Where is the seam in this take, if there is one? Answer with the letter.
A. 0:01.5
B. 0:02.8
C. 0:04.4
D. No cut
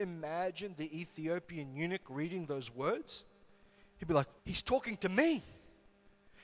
C